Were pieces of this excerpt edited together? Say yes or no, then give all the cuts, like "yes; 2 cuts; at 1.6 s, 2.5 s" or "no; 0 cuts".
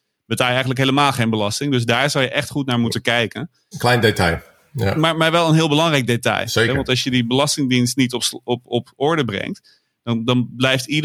yes; 1 cut; at 3.7 s